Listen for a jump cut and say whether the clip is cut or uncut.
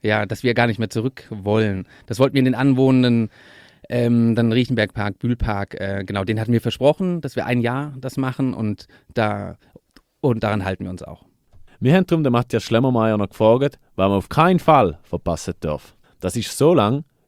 cut